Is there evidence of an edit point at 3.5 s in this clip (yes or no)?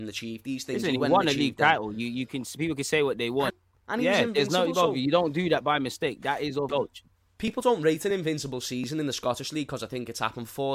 yes